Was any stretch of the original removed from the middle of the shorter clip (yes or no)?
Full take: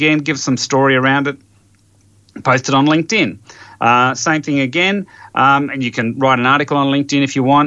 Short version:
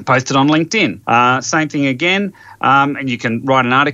yes